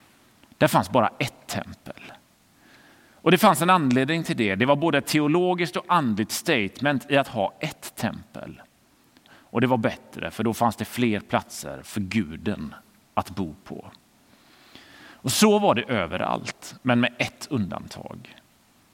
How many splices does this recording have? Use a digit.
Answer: 1